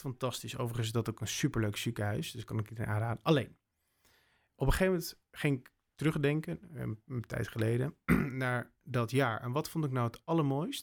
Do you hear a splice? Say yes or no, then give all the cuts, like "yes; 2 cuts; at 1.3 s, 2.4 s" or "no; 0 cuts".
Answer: no; 0 cuts